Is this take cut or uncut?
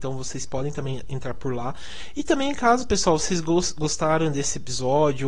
uncut